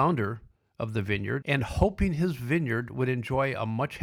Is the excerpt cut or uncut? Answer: cut